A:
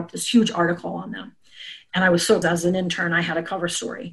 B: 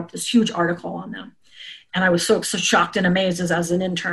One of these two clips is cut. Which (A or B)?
A